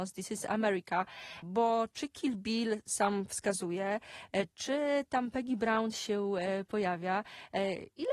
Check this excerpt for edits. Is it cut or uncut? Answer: cut